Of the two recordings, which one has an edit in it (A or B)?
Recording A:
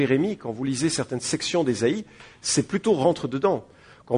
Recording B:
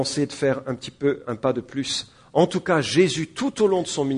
B